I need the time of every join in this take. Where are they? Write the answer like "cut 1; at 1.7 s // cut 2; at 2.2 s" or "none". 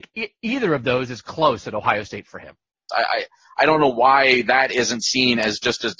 cut 1; at 2.9 s